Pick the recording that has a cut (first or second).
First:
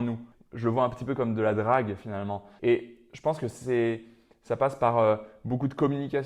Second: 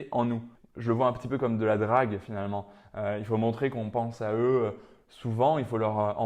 first